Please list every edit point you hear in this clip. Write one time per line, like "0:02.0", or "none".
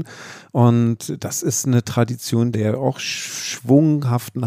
0:02.5